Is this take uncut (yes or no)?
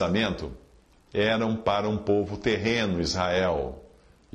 yes